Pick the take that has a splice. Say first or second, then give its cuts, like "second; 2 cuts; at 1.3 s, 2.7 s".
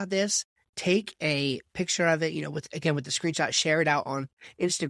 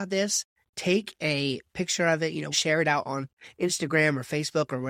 second; 1 cut; at 2.5 s